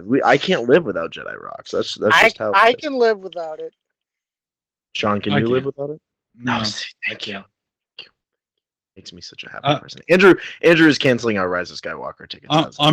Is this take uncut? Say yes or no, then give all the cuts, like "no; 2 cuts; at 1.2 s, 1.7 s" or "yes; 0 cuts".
yes; 0 cuts